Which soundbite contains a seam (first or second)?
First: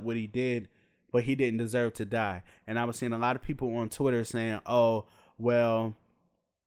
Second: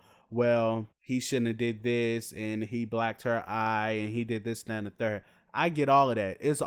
second